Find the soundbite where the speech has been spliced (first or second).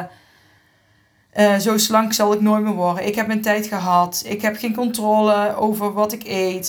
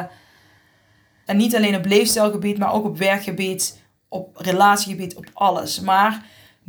second